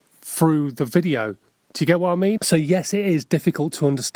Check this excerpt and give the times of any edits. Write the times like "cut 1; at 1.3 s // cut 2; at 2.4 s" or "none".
cut 1; at 2.4 s